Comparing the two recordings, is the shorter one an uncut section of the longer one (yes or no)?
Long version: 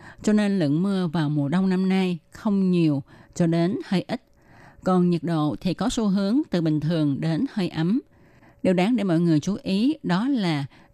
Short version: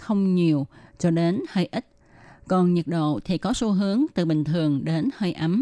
yes